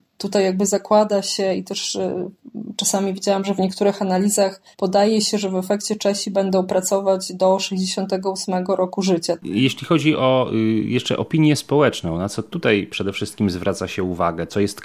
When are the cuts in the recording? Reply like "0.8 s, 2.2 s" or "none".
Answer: 4.7 s, 9.4 s